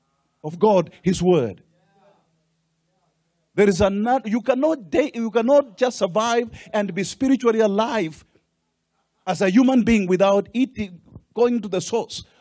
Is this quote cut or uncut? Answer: uncut